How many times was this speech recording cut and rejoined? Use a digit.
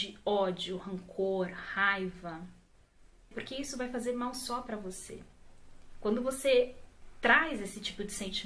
1